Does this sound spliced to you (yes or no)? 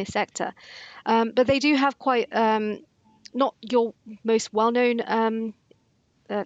no